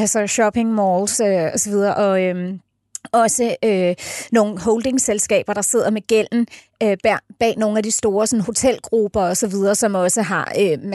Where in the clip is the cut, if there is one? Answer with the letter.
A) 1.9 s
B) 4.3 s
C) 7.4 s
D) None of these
D